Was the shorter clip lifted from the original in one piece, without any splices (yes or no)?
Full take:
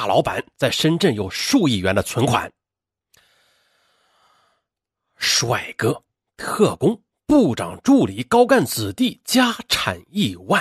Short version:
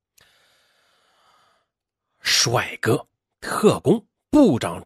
yes